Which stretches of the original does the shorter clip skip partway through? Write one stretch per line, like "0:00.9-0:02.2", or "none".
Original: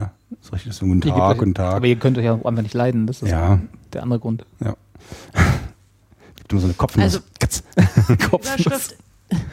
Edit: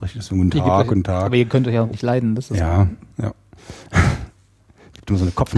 0:02.4-0:02.6
0:03.8-0:04.5

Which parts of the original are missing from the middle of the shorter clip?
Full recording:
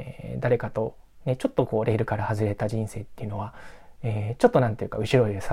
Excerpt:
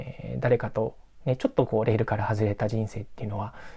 none

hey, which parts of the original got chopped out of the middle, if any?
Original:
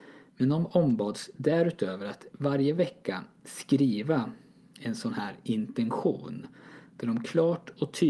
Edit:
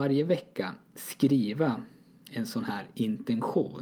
none

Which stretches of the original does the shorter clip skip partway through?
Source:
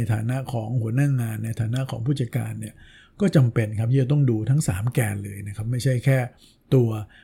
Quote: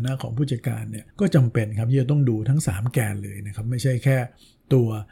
0:02.8-0:03.1

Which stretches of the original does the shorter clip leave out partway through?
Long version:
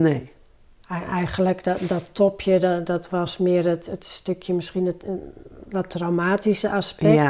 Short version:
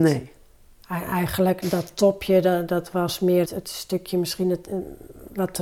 0:01.6-0:01.8
0:03.6-0:03.8

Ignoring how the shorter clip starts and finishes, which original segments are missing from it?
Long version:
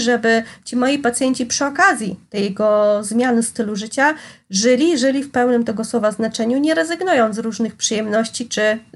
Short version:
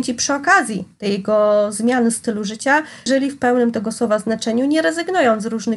0:04.4-0:05.0

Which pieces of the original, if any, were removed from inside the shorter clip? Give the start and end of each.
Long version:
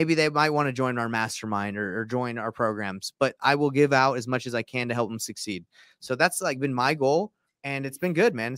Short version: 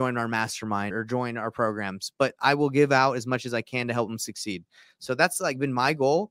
0:01.7-0:01.9

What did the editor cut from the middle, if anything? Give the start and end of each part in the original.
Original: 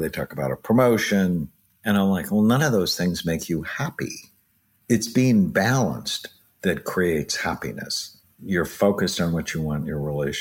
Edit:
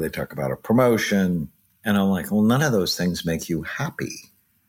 none

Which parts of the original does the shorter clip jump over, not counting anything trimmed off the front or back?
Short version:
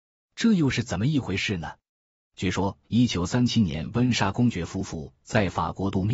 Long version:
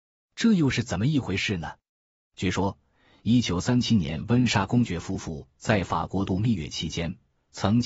0:02.8-0:03.2

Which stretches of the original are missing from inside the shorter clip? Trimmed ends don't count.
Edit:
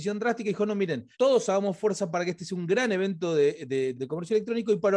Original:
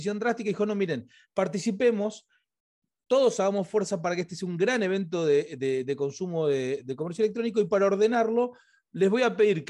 0:01.1-0:03.0
0:05.8-0:06.8

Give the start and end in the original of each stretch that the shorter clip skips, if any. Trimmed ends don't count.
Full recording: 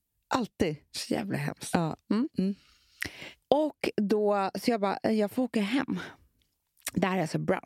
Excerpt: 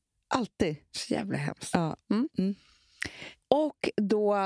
none

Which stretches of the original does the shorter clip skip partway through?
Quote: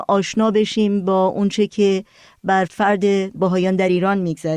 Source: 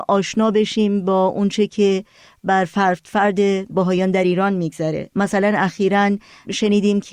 0:02.7-0:03.0

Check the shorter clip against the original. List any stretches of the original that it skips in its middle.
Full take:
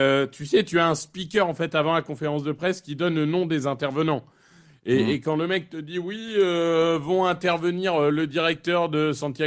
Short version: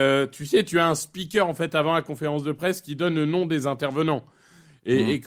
none

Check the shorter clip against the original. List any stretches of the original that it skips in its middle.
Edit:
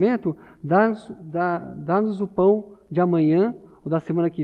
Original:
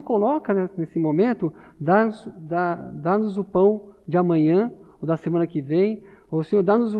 none

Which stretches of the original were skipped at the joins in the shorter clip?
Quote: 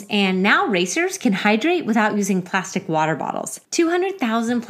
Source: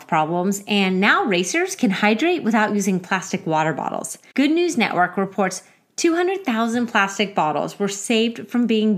0:04.2-0:05.9

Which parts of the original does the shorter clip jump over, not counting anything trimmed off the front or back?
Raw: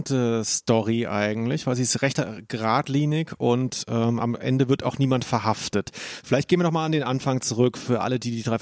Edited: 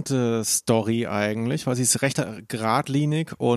none

